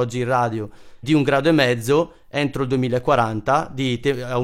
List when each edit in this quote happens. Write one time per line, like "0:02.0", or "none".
0:01.0